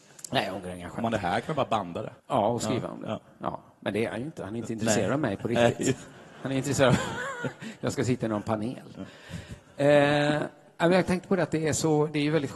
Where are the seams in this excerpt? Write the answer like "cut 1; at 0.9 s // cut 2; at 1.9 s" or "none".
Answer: cut 1; at 2.2 s